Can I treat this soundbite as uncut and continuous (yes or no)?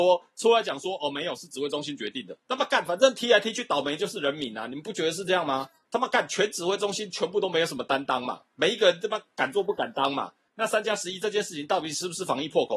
no